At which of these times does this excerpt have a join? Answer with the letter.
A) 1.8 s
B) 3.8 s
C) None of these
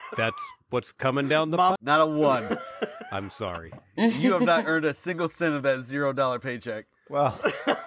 A